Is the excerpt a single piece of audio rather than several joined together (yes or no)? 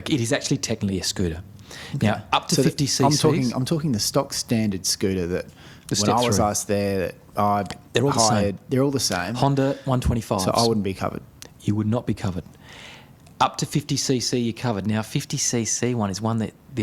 yes